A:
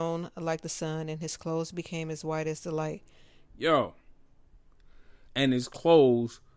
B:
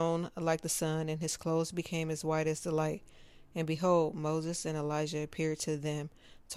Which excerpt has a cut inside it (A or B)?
A